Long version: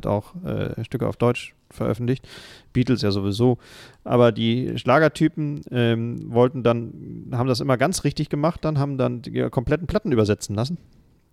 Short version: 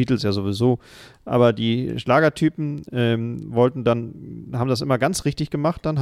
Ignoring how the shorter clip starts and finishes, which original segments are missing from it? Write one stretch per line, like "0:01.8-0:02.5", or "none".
none